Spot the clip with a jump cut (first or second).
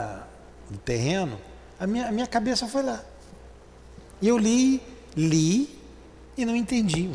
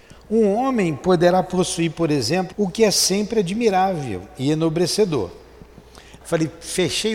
second